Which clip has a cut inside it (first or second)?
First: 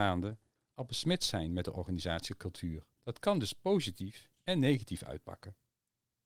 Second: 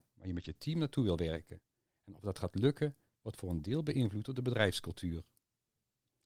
first